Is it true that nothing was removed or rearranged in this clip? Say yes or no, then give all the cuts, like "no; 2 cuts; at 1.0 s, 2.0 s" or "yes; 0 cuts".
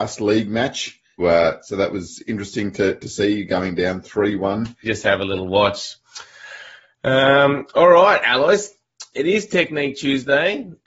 no; 2 cuts; at 1.2 s, 4.8 s